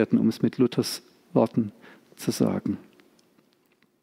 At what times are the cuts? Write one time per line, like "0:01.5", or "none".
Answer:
none